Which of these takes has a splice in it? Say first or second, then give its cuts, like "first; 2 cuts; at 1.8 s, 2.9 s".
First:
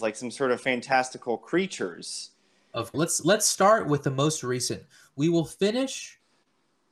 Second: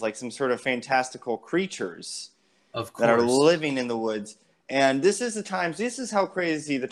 first; 1 cut; at 2.9 s